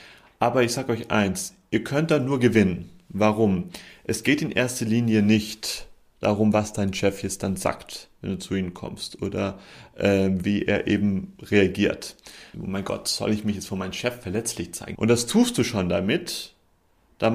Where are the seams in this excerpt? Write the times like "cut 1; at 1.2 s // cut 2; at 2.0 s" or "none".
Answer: cut 1; at 12.5 s // cut 2; at 14.9 s